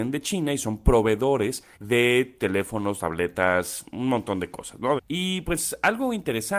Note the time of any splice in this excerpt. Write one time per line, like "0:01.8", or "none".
0:01.7
0:05.0